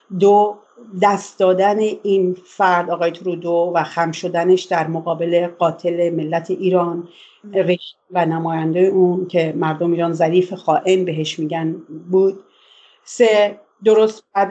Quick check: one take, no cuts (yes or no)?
yes